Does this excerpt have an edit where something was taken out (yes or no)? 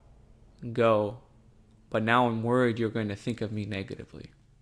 no